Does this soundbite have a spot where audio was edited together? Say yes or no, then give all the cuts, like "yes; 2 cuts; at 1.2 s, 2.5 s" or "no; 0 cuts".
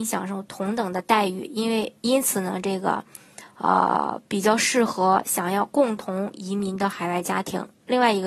no; 0 cuts